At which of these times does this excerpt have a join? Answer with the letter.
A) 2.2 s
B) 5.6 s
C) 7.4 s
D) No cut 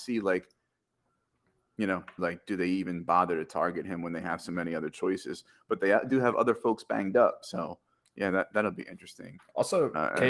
A